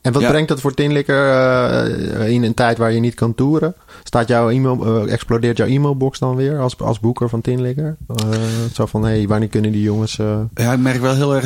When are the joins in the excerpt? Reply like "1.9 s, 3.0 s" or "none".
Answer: none